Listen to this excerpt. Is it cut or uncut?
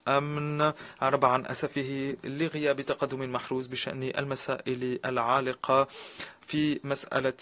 cut